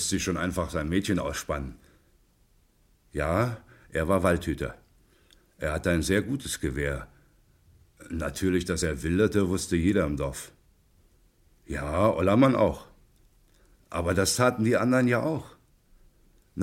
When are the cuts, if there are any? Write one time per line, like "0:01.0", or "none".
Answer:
none